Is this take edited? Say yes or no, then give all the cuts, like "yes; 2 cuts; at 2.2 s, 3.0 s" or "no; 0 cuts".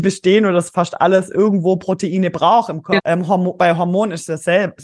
yes; 1 cut; at 3.0 s